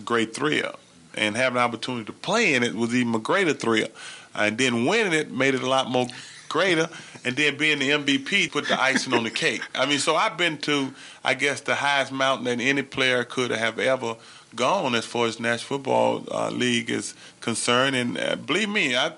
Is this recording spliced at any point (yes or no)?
yes